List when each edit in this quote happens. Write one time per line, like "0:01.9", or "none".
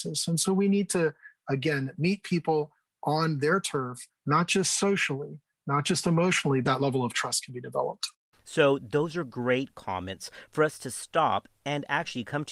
0:04.1
0:06.6